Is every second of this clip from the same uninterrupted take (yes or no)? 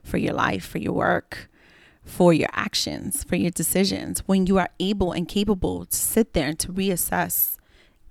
yes